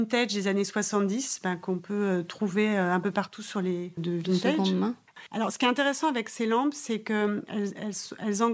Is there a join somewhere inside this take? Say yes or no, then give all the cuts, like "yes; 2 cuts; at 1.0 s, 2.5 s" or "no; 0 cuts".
yes; 1 cut; at 4.0 s